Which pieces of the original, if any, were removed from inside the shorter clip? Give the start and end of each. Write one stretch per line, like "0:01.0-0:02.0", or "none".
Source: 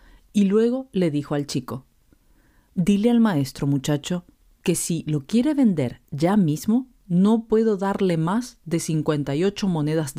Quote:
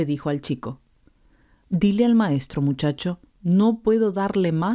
0:04.4-0:07.0